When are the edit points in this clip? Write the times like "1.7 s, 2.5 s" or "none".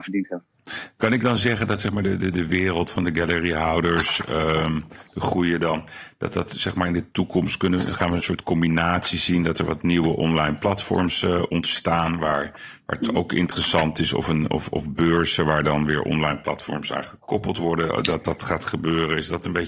8.2 s

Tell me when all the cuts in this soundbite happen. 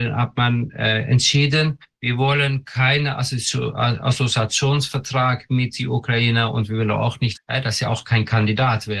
7.3 s

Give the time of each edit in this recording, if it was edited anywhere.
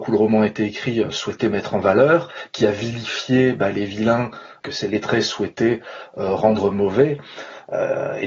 none

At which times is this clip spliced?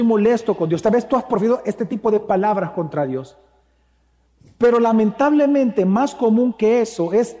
none

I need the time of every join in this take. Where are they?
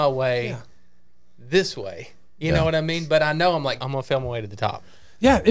3.8 s

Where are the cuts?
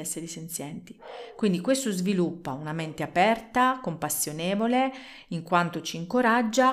none

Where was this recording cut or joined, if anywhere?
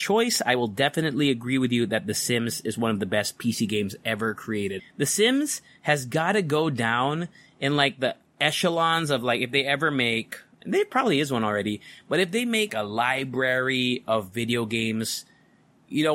4.8 s, 12.7 s

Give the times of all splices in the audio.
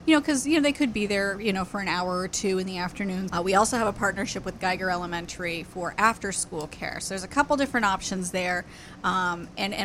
3.3 s

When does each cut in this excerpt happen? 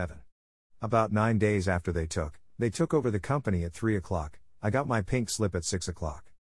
2.5 s

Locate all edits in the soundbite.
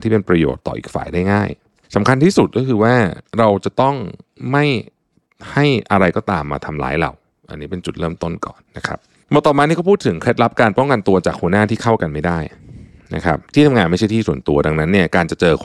8.6 s, 13.4 s

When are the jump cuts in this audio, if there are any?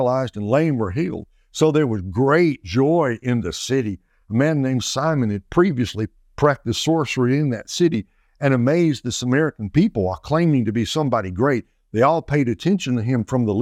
none

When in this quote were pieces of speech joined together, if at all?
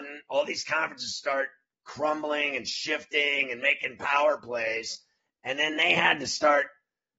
none

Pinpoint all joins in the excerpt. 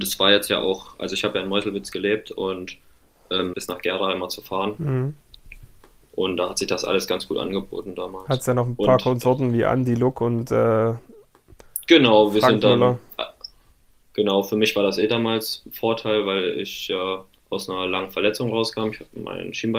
3.5 s

